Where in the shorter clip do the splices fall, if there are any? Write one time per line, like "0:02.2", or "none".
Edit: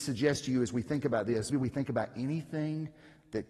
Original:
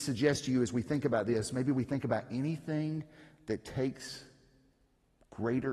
0:01.5